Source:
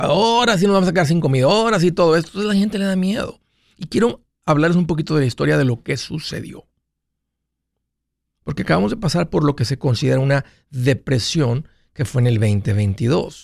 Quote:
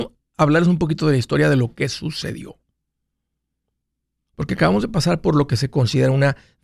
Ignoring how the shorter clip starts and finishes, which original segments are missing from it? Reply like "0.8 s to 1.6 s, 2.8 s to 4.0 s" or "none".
none